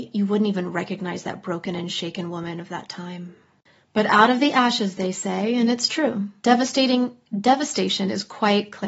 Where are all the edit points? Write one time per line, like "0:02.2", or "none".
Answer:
0:06.4